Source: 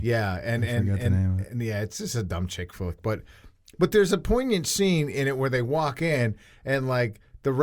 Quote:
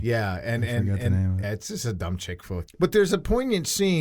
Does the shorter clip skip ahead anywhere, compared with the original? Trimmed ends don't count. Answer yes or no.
yes